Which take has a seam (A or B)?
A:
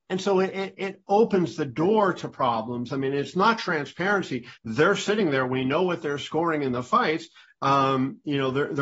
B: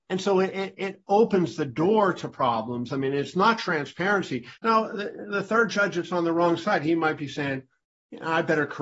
B